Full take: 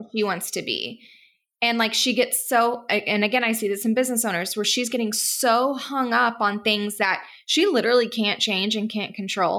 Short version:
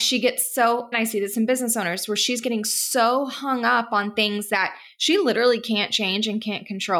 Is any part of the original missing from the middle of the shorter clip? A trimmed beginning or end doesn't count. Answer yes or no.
yes